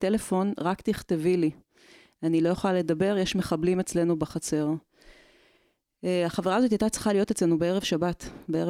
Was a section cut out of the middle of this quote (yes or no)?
no